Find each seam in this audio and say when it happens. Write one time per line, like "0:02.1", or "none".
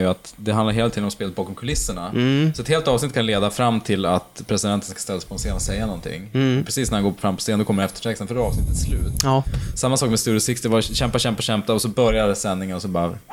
none

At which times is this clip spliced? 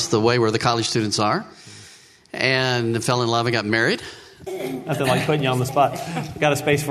0:04.5

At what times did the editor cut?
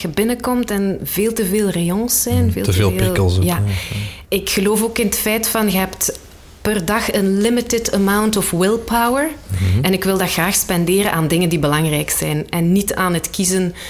0:04.2

